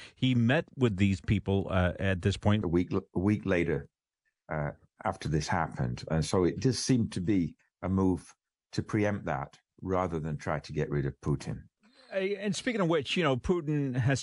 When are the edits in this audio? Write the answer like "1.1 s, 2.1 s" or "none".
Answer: 2.6 s